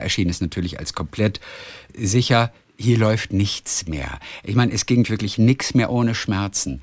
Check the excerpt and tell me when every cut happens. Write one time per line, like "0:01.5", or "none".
0:05.0